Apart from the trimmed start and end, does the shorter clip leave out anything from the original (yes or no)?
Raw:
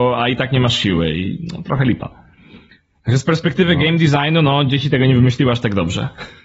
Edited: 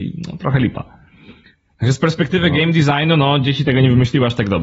no